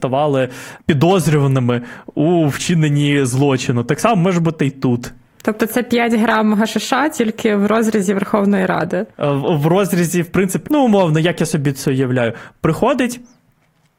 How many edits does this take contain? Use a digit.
2